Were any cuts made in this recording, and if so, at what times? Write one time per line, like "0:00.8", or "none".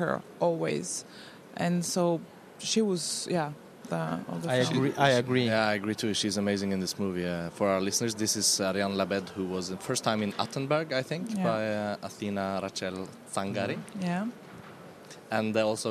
0:03.9